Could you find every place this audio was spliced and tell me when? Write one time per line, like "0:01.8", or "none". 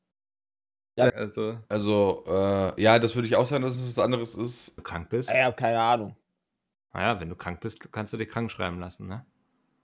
0:01.1
0:04.8